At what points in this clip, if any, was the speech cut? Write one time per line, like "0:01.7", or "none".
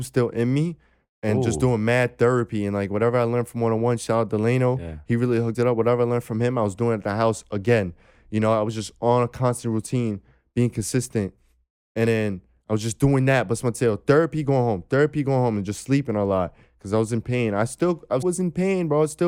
0:18.2